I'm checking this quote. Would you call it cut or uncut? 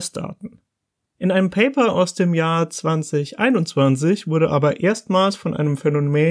uncut